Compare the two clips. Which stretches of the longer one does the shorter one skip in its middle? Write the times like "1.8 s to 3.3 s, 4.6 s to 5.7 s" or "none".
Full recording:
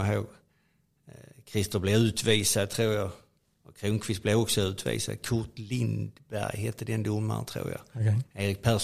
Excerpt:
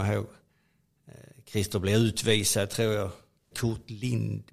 3.5 s to 5.2 s

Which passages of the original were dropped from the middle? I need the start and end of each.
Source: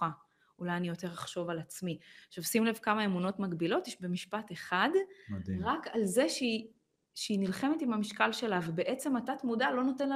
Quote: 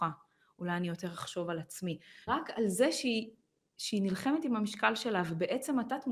2.3 s to 5.6 s

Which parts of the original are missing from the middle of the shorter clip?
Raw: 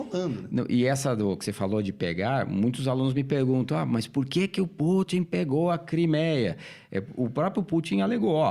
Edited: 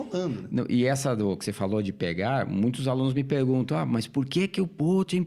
none

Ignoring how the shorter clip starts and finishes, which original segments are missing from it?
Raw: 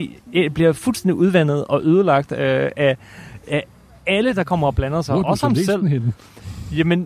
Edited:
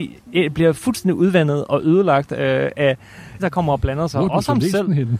3.4 s to 4.3 s

